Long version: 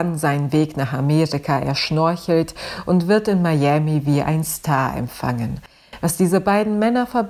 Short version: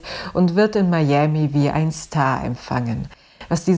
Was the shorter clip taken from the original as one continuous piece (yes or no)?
yes